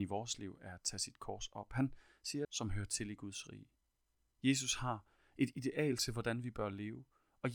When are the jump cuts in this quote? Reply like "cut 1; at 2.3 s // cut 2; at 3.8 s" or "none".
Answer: cut 1; at 2.4 s